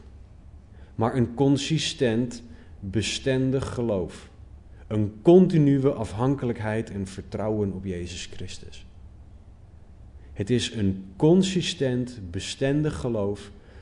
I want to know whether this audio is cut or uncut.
uncut